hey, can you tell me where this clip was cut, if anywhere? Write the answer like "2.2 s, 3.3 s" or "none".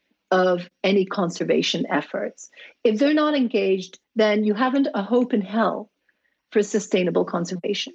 4.0 s